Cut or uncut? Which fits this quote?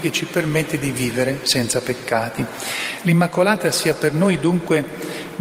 uncut